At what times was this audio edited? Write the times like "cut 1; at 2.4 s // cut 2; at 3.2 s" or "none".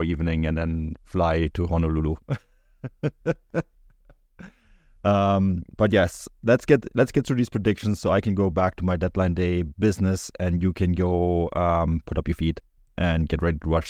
none